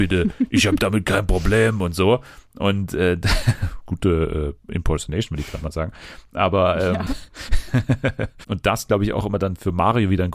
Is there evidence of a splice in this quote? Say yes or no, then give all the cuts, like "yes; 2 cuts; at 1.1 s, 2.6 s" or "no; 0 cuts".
yes; 1 cut; at 8.4 s